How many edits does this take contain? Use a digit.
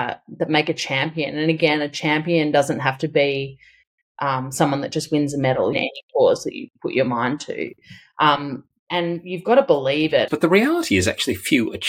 2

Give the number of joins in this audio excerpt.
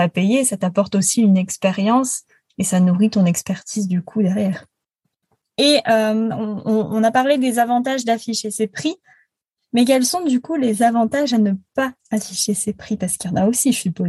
1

